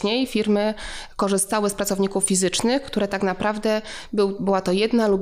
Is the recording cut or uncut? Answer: uncut